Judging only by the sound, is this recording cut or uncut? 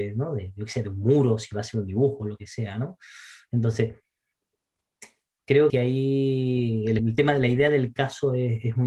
cut